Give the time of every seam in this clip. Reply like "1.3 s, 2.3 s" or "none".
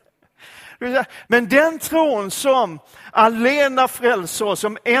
1.3 s

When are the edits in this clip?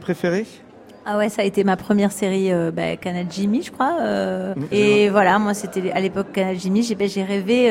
4.7 s

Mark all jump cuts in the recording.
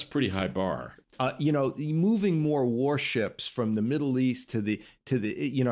1.0 s

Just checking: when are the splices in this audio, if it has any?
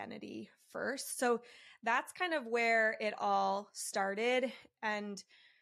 none

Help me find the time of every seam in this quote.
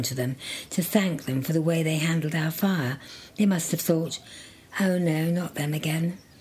none

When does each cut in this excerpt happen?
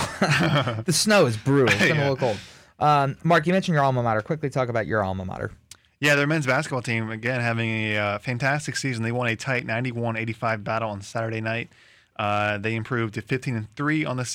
none

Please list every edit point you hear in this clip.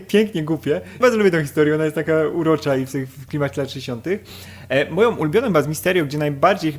1.0 s

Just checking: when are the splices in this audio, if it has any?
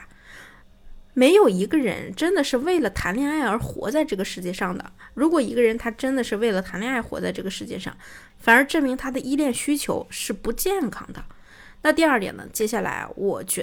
none

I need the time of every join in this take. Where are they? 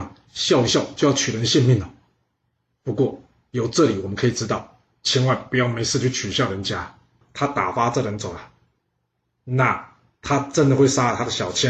7.2 s

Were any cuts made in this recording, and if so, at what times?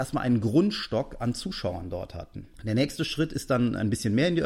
2.5 s

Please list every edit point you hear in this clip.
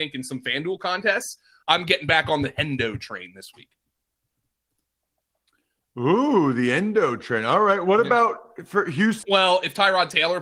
1.6 s, 9.2 s

